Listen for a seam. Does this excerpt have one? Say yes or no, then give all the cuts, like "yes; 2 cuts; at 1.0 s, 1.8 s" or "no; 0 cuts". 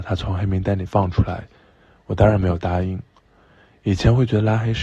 no; 0 cuts